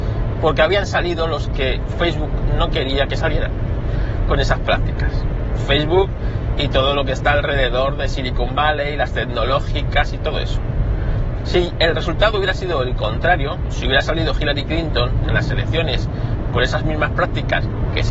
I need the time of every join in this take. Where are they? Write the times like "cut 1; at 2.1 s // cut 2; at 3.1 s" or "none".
none